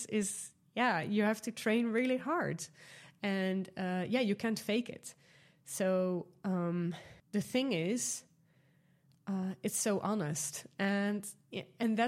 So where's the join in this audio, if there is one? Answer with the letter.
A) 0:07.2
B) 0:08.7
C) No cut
A